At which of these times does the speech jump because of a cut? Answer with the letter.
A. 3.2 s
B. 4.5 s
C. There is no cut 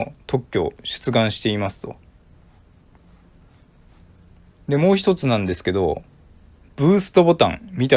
C